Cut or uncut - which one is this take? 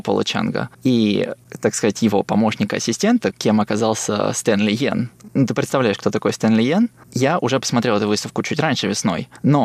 cut